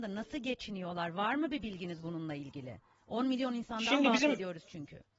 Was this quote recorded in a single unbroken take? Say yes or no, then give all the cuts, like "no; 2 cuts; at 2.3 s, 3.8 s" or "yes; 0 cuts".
yes; 0 cuts